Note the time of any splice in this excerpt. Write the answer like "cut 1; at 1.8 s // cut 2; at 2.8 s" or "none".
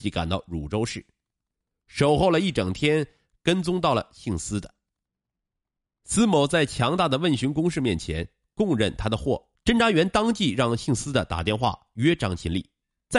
cut 1; at 9.5 s